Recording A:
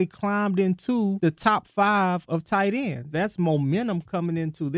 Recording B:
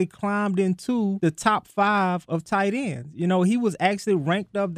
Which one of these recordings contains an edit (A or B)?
A